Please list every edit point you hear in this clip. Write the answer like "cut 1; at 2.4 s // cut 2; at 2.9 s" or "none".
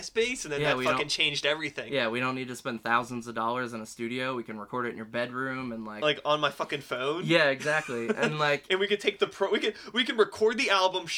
none